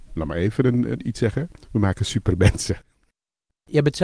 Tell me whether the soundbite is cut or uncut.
uncut